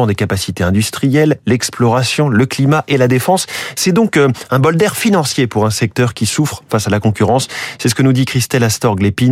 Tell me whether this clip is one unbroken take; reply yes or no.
yes